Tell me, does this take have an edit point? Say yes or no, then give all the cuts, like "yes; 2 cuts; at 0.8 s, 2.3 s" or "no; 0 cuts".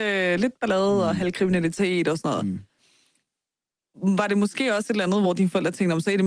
no; 0 cuts